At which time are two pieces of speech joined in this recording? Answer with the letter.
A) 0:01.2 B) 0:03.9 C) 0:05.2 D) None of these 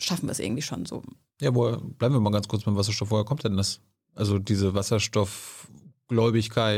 D